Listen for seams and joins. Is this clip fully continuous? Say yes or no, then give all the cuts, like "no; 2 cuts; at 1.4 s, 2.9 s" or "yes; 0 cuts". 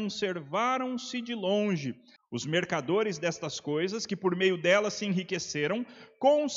no; 1 cut; at 2.2 s